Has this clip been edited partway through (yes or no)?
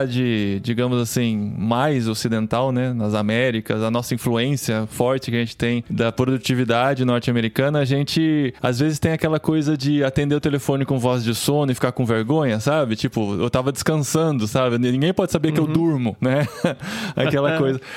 no